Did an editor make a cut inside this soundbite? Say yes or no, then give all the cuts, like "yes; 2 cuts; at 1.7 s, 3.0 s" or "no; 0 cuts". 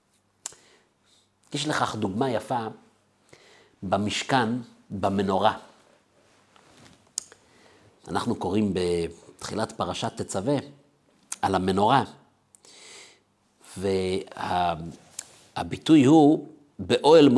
no; 0 cuts